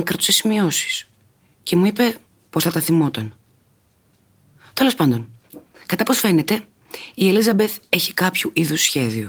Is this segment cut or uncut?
uncut